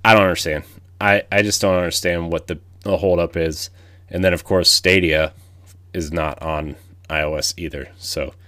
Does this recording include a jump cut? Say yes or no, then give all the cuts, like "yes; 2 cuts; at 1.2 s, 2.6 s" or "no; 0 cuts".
no; 0 cuts